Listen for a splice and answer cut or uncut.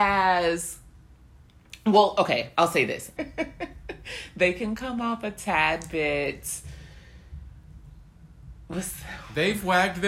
cut